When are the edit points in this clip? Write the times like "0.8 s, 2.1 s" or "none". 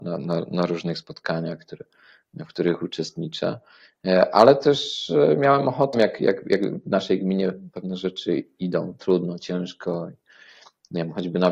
5.9 s